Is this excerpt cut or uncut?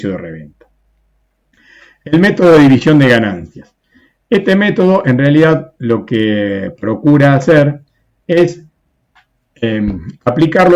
uncut